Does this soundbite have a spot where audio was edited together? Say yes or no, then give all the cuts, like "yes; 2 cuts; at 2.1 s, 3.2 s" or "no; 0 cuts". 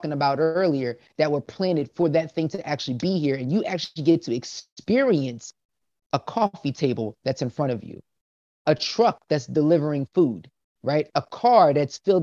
no; 0 cuts